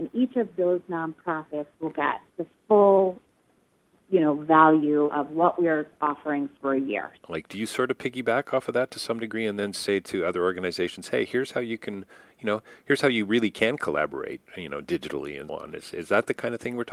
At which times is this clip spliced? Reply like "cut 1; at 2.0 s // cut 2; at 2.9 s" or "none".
cut 1; at 7.2 s // cut 2; at 15.5 s